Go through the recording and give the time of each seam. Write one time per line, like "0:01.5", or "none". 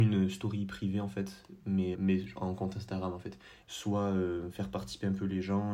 0:01.9
0:03.6